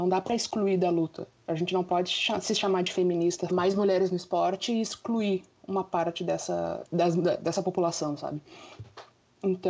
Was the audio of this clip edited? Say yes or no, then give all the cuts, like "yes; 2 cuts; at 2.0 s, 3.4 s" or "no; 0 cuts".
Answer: yes; 2 cuts; at 3.5 s, 6.8 s